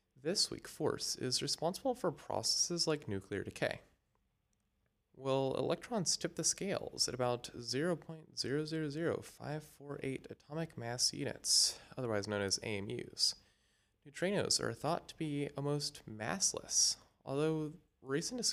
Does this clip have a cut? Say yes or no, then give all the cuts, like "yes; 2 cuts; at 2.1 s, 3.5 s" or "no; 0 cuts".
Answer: yes; 1 cut; at 4.9 s